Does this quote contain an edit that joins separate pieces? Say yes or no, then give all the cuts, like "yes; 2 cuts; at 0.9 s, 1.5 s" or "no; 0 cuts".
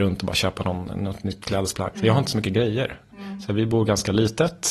yes; 1 cut; at 1.9 s